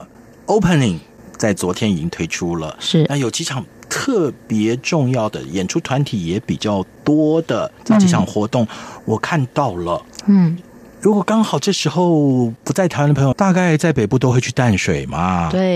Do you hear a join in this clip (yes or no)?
yes